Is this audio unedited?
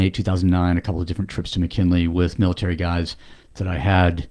yes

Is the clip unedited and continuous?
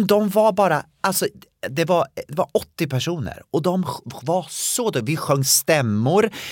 yes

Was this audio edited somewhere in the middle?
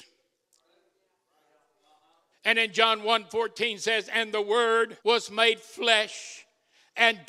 yes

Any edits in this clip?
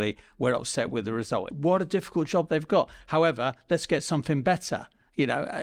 yes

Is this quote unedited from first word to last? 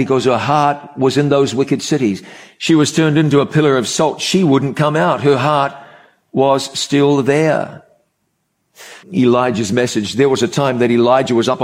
no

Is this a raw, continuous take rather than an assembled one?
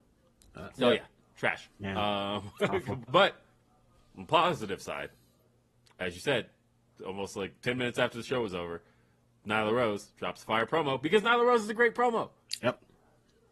no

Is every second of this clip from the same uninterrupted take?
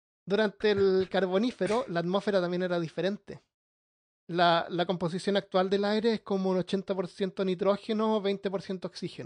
yes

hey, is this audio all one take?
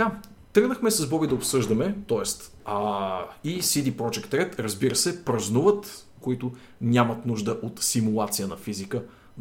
no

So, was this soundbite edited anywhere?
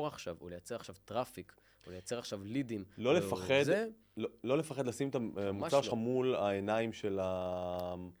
no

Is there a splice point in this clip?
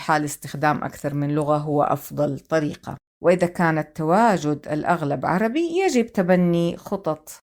yes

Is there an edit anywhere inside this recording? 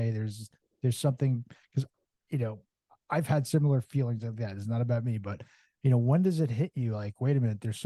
no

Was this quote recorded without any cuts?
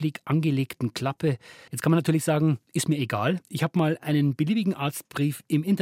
no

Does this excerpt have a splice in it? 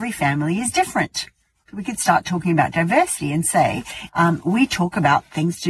yes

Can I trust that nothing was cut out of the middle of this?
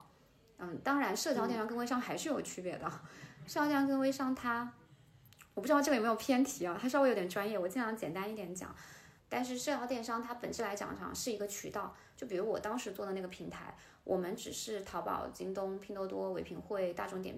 no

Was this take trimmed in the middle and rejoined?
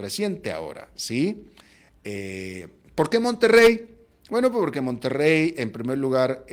no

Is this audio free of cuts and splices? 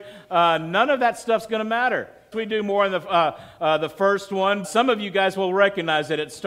no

